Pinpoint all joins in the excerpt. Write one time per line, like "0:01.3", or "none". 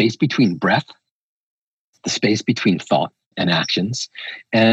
0:03.3